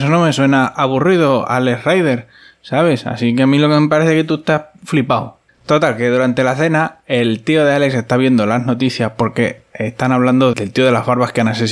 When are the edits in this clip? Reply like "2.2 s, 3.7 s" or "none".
5.5 s, 10.5 s